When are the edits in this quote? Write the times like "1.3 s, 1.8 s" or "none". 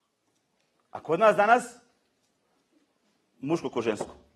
none